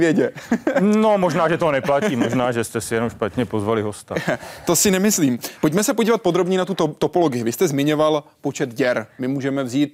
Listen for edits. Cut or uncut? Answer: uncut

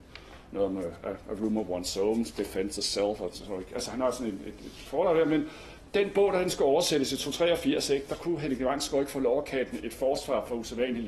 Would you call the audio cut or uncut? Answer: uncut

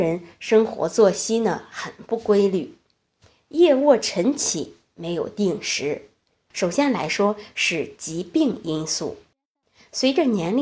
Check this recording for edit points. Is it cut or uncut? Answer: cut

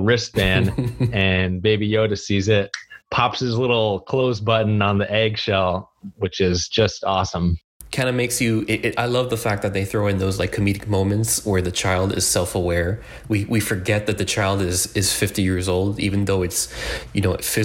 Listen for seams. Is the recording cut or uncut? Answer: cut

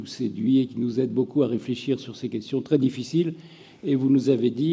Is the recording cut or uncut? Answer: uncut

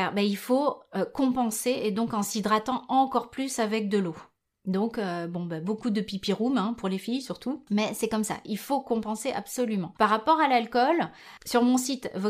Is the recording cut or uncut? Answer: uncut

